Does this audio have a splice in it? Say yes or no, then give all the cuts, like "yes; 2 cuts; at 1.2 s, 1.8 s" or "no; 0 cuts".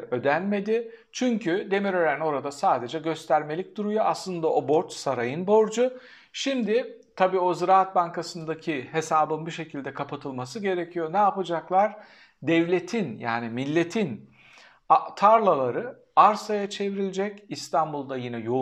no; 0 cuts